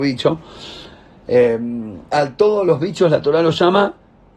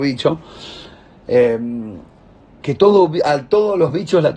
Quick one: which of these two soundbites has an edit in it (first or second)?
first